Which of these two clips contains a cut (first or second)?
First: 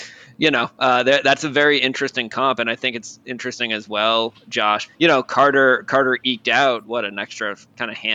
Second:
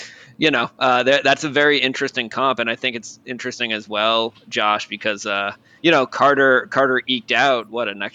first